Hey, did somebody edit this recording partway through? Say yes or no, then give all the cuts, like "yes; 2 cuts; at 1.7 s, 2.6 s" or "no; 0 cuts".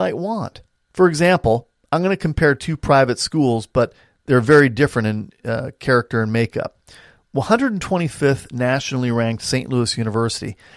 no; 0 cuts